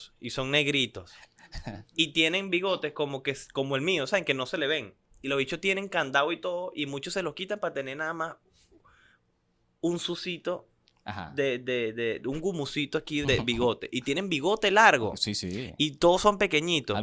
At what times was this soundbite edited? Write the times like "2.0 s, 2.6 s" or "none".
13.2 s